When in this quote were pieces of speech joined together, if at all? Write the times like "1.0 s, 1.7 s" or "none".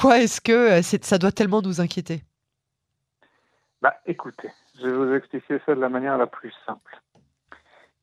none